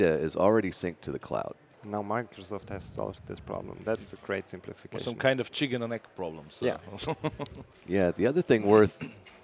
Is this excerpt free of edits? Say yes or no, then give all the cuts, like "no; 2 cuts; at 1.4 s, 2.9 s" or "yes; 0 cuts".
no; 1 cut; at 1.7 s